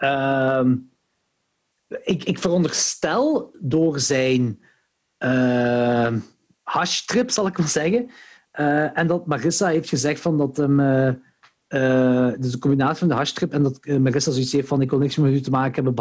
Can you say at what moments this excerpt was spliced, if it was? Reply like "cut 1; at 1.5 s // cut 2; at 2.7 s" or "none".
none